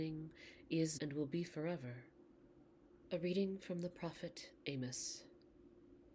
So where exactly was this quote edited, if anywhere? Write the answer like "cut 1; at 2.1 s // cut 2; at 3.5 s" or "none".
cut 1; at 1.0 s // cut 2; at 3.0 s